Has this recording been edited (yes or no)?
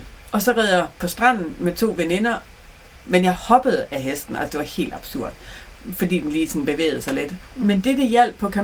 yes